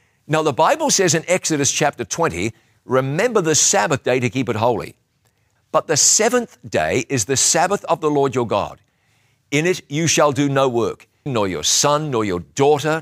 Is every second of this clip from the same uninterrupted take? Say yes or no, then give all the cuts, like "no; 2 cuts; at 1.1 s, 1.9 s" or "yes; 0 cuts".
no; 2 cuts; at 5.6 s, 11.3 s